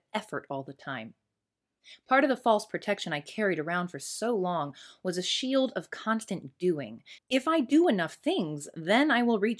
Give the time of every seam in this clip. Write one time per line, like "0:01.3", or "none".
0:07.2

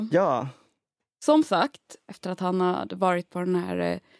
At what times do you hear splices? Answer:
0:02.1

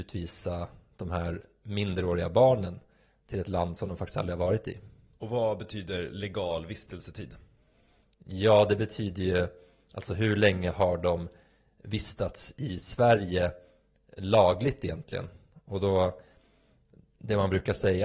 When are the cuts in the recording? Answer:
none

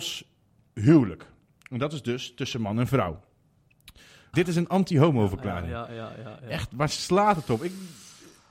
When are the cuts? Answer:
0:04.3

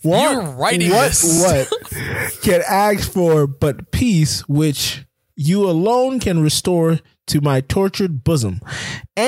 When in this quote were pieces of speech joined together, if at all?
none

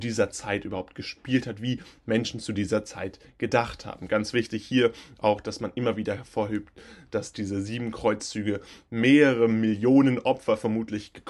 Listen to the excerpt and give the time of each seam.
none

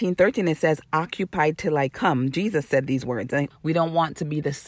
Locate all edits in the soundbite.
0:03.5

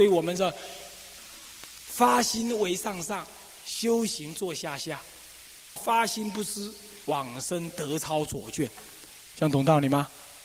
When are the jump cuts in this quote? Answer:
0:05.8
0:07.0

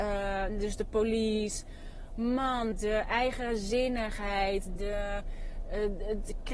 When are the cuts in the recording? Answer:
0:02.7
0:04.8

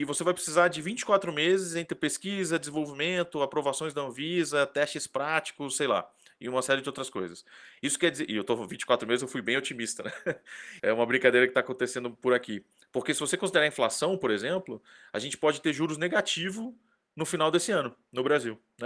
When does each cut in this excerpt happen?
0:10.8

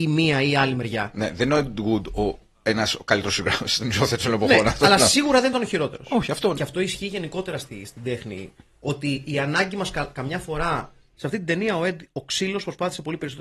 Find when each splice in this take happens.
0:06.6
0:11.2

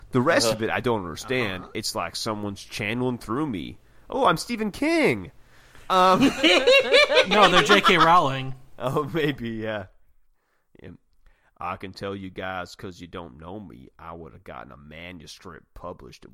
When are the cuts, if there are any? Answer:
none

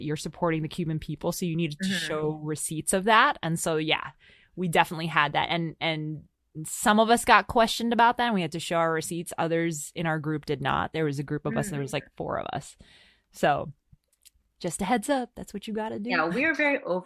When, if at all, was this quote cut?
none

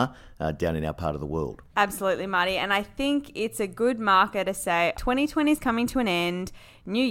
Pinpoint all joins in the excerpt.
0:01.7
0:04.9

